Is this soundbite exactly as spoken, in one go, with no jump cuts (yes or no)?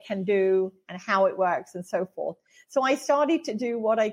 yes